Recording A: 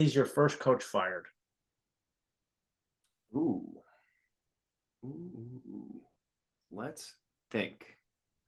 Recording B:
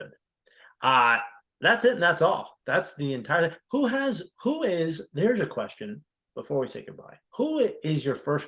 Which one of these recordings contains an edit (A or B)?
B